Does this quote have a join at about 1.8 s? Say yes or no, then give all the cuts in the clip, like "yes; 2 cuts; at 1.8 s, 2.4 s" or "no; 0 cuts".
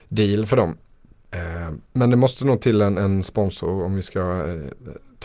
yes; 1 cut; at 1.8 s